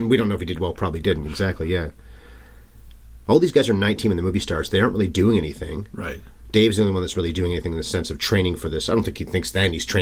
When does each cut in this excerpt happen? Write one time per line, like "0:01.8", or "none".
none